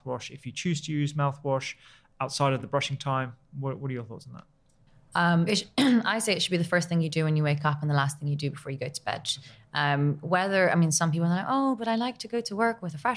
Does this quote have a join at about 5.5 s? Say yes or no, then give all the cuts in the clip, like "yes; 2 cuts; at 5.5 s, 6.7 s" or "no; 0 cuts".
yes; 1 cut; at 5.5 s